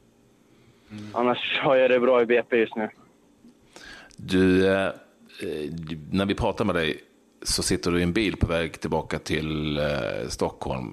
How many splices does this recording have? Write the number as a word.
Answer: zero